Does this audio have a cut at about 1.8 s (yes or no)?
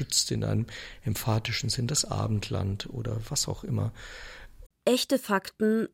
no